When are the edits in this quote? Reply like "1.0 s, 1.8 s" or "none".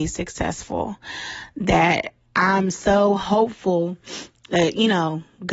none